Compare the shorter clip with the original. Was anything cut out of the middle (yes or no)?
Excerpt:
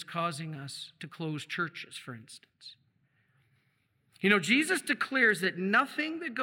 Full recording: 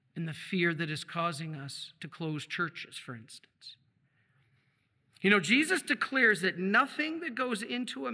no